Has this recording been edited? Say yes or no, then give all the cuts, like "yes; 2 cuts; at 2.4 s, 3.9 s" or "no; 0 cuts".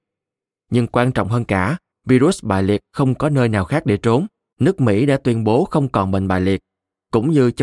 yes; 2 cuts; at 1.9 s, 4.5 s